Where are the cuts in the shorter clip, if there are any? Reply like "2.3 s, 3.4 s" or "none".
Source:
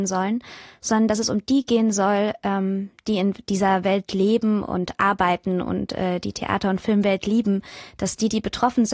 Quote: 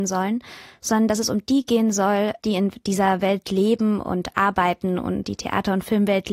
2.4 s, 5.2 s